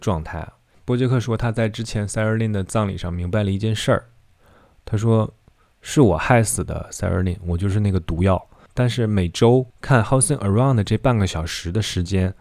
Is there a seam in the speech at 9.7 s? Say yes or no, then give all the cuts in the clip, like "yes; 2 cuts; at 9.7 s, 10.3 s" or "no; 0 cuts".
yes; 2 cuts; at 8.7 s, 9.7 s